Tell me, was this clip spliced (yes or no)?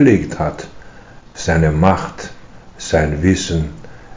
no